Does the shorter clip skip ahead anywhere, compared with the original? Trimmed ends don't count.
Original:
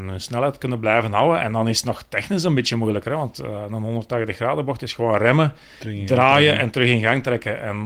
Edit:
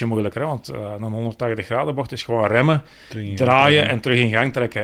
no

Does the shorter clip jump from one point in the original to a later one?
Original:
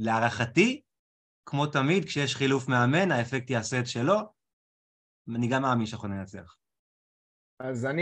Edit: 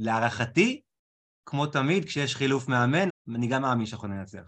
yes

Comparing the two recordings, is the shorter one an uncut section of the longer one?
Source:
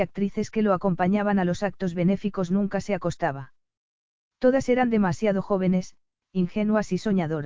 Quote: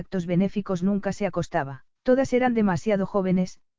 no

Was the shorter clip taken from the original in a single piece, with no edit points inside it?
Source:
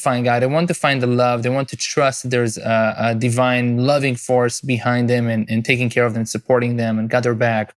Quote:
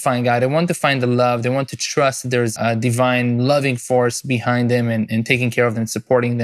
no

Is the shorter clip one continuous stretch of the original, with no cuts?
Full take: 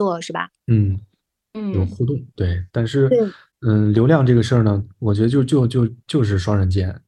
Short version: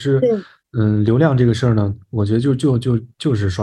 yes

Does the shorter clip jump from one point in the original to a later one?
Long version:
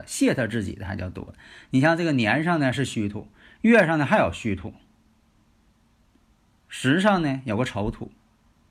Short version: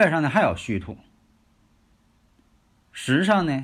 no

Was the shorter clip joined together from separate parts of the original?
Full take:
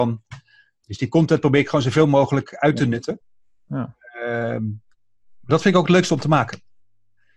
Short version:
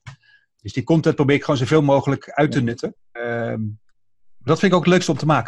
yes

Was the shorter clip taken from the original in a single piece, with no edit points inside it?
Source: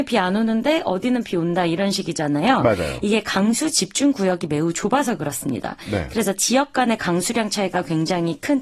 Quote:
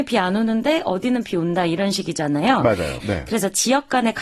no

